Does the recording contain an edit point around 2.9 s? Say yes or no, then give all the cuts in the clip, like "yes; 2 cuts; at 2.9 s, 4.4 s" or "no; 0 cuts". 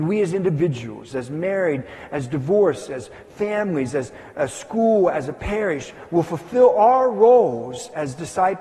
no; 1 cut; at 1.1 s